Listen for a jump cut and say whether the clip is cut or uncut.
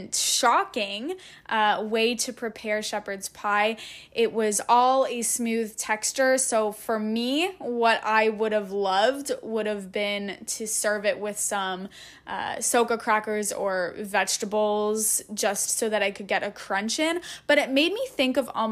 uncut